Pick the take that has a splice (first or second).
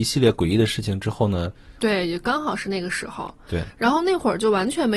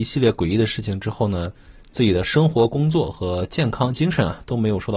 first